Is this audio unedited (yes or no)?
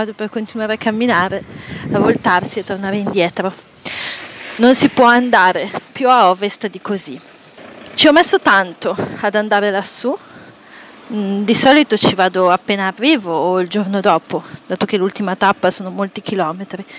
yes